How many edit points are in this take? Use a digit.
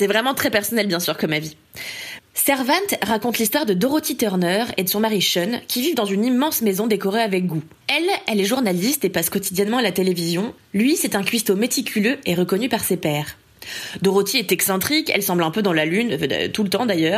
1